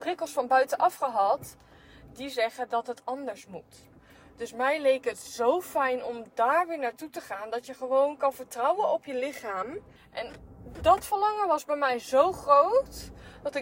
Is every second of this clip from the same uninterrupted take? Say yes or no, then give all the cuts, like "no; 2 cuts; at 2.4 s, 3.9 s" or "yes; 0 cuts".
no; 1 cut; at 10.0 s